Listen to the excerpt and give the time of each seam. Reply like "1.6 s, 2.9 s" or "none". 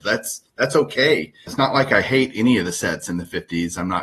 1.5 s